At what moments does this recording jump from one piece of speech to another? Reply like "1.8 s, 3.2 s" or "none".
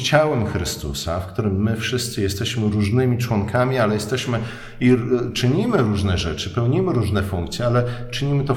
none